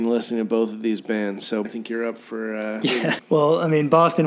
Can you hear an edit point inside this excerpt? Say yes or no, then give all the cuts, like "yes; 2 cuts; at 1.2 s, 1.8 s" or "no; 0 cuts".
yes; 2 cuts; at 1.6 s, 3.2 s